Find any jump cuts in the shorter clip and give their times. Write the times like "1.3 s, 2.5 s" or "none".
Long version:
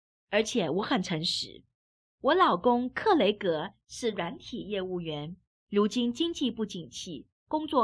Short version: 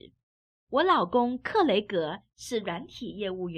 none